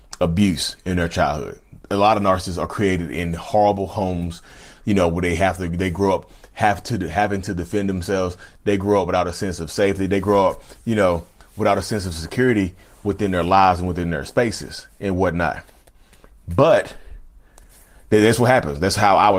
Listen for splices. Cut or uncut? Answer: uncut